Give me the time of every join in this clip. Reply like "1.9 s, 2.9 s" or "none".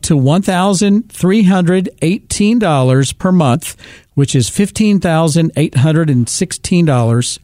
none